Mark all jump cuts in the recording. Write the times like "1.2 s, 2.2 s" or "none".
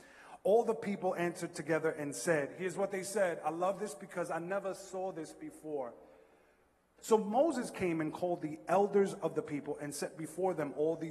7.0 s